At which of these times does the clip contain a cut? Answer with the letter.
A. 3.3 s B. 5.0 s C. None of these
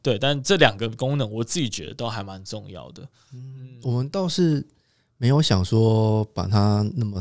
C